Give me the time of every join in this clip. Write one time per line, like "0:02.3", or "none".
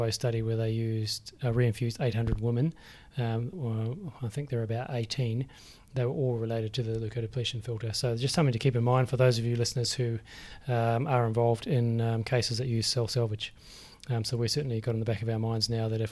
0:03.5